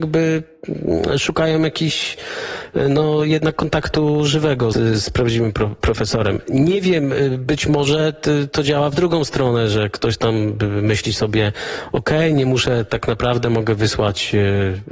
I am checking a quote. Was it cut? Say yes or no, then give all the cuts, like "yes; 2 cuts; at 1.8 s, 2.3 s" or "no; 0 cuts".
yes; 1 cut; at 4.7 s